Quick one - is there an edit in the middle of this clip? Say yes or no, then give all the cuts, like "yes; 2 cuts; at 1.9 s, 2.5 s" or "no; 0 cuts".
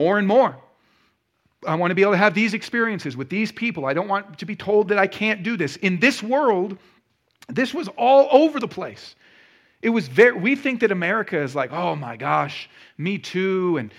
no; 0 cuts